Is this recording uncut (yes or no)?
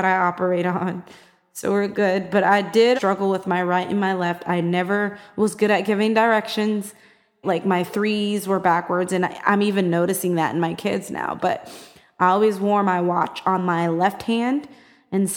no